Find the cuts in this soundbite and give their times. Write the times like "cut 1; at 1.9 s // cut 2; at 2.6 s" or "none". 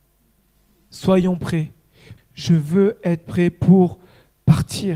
cut 1; at 2.2 s